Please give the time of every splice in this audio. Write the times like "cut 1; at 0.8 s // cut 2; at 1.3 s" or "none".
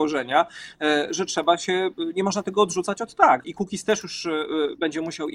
cut 1; at 1.1 s // cut 2; at 3.4 s

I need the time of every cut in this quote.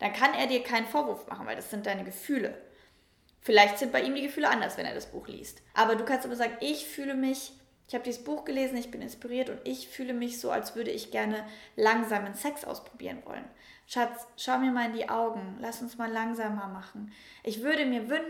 cut 1; at 5.7 s

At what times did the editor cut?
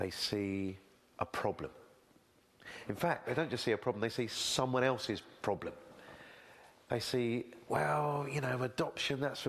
none

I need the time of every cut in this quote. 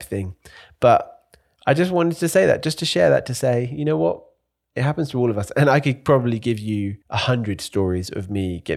cut 1; at 7.0 s

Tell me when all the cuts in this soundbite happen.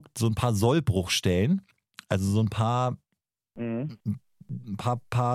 none

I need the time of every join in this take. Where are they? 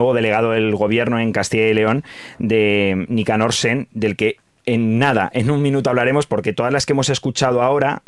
cut 1; at 6.3 s

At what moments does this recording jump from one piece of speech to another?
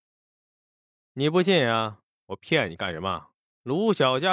none

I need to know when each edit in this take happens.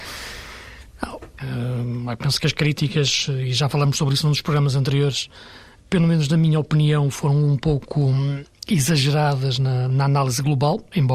cut 1; at 1.4 s

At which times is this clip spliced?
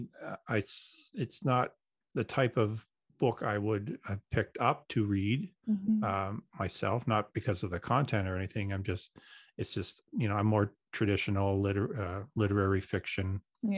none

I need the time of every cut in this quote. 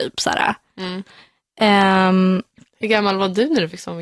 none

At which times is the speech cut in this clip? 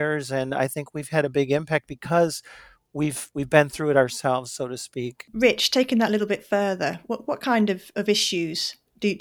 none

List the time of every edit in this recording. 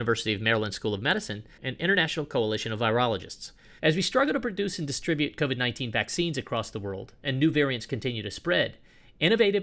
cut 1; at 1.6 s // cut 2; at 3.8 s

